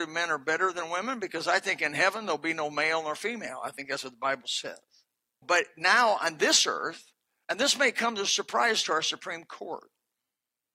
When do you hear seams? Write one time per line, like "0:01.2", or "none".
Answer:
0:05.4
0:07.4